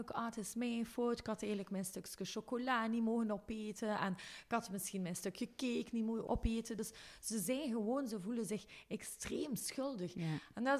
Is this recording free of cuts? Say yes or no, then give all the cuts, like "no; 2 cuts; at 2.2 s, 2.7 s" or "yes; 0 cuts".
yes; 0 cuts